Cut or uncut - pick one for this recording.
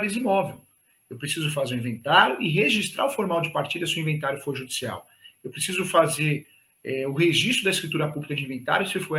uncut